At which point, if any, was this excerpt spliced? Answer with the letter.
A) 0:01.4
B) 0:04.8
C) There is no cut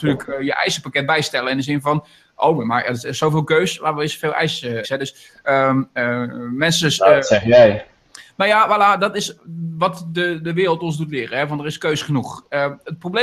B